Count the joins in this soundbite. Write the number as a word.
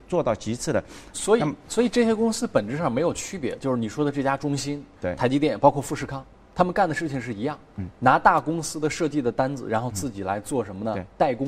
one